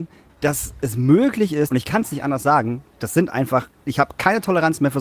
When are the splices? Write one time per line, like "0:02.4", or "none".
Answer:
0:01.7